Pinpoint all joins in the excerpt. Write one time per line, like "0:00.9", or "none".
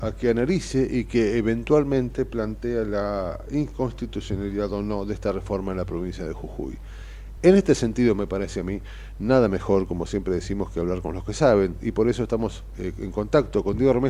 none